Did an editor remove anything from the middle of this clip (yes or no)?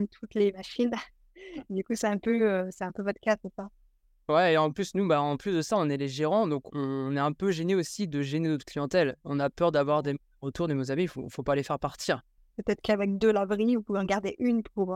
yes